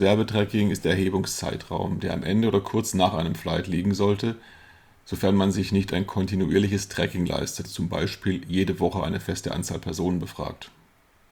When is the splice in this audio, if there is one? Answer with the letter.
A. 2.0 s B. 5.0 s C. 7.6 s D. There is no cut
C